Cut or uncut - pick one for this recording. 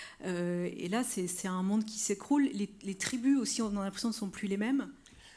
uncut